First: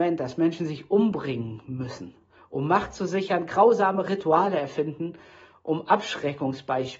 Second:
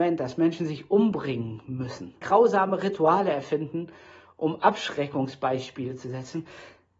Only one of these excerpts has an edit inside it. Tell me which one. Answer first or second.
second